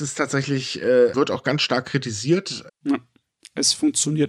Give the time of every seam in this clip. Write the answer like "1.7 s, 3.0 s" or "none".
1.1 s, 2.7 s

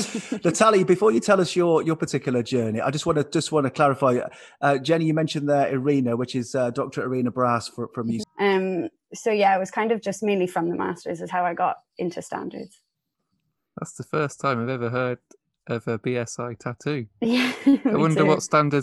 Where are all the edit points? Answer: 8.2 s

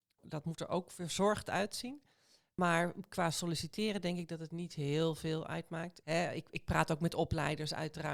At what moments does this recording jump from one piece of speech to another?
6.0 s

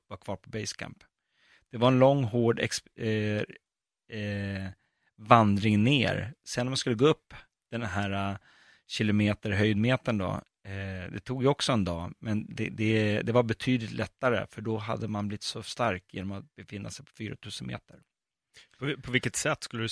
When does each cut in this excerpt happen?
none

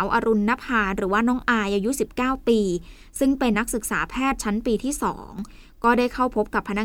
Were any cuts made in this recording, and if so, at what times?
3.5 s

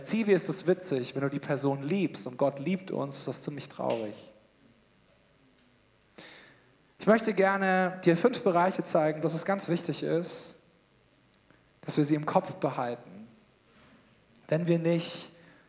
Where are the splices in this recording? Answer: 9.2 s

